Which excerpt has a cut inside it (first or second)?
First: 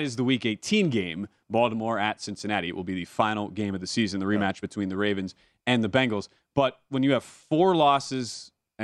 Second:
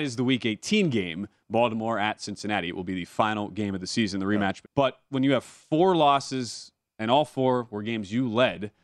second